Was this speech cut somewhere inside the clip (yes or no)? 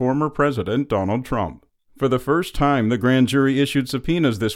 no